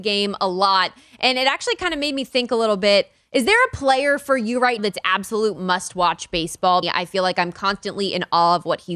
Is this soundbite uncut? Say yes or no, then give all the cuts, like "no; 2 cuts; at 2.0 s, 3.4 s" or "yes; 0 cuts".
no; 2 cuts; at 4.8 s, 6.8 s